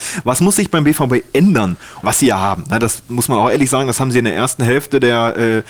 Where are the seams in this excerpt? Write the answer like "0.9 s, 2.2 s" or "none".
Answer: 2.0 s